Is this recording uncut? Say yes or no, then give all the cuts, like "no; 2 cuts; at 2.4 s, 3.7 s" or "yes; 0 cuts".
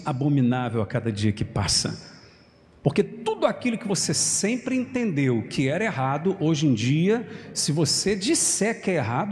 yes; 0 cuts